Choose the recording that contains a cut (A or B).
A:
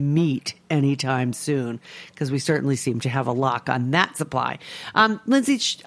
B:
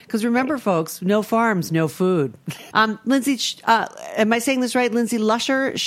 B